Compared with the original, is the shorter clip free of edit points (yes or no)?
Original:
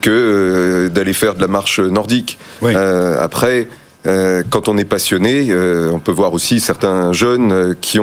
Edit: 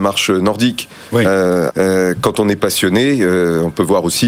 no